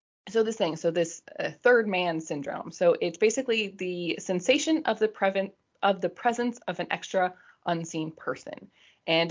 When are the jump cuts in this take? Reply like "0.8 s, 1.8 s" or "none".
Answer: none